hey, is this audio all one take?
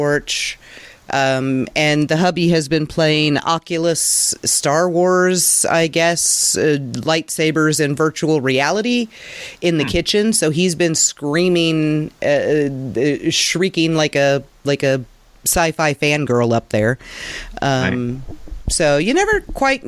yes; 0 cuts

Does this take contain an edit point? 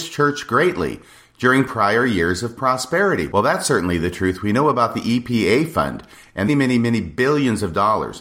yes; 1 cut; at 6.5 s

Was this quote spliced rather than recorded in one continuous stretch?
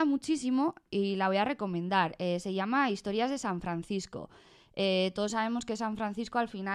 no; 0 cuts

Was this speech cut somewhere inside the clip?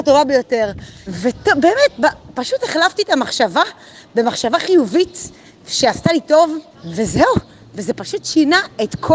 yes; 2 cuts; at 1.1 s, 6.7 s

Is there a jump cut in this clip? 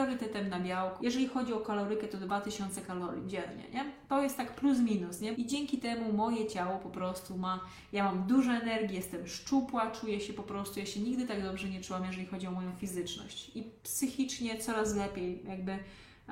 yes; 2 cuts; at 1.0 s, 5.3 s

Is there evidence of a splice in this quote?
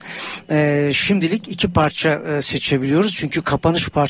no; 0 cuts

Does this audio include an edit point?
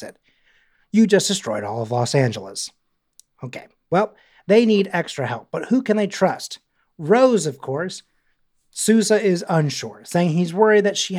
no; 0 cuts

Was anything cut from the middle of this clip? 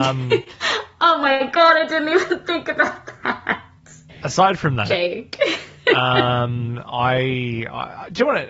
yes; 1 cut; at 4.1 s

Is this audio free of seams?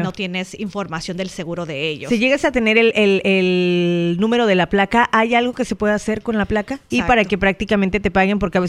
no; 1 cut; at 6.9 s

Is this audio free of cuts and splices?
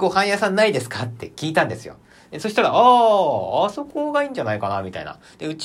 yes; 0 cuts

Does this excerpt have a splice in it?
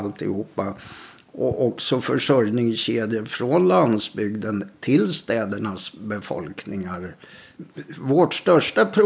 no; 0 cuts

